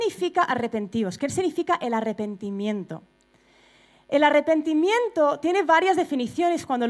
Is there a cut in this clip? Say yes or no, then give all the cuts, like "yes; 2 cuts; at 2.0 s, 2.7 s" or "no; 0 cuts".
no; 0 cuts